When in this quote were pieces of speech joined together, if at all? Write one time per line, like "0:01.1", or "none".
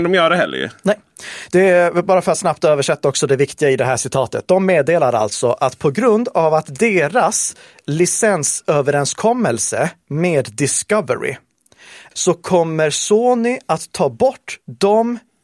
0:12.1